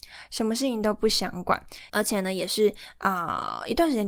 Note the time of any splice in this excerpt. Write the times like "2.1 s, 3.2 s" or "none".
1.9 s